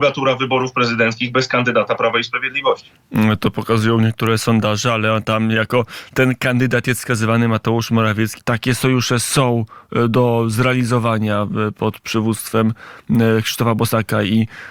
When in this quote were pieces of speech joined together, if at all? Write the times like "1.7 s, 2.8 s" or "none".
8.4 s